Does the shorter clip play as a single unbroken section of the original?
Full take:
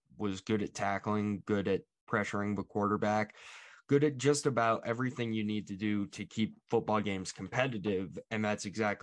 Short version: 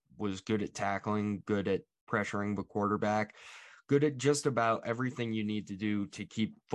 yes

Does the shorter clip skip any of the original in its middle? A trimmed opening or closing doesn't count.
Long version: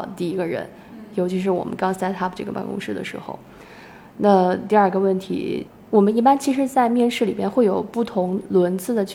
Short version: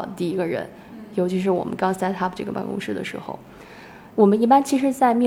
yes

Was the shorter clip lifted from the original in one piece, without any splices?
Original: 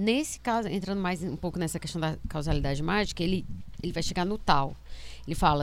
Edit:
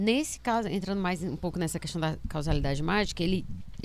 yes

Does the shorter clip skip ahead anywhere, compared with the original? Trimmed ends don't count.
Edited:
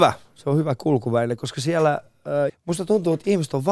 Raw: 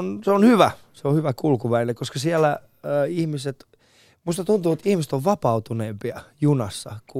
yes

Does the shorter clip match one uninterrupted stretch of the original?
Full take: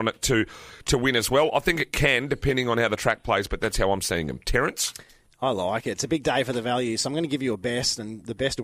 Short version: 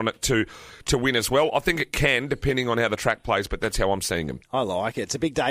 no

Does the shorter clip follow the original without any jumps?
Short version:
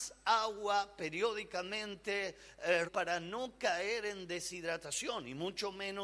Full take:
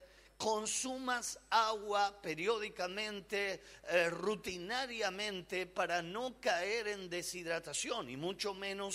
no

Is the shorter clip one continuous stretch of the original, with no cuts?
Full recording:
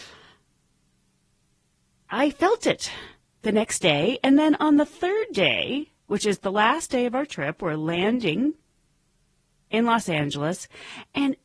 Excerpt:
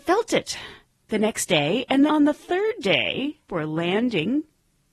no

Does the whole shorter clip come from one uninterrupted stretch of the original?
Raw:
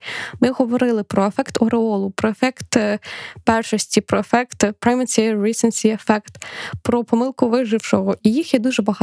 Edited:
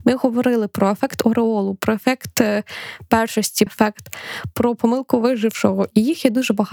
no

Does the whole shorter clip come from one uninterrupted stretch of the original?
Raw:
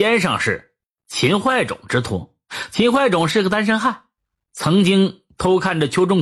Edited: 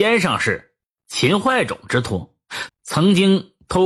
no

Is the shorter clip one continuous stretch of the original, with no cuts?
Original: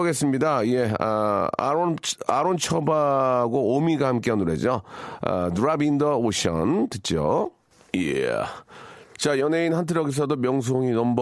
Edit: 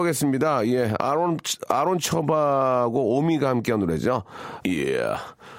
no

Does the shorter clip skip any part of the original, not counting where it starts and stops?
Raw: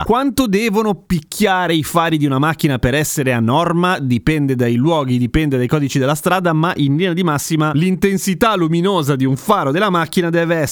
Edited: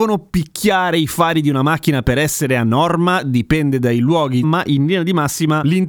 yes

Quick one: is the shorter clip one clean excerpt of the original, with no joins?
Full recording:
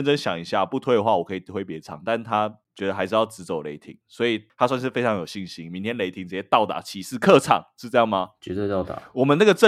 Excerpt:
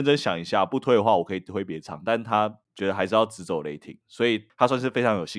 yes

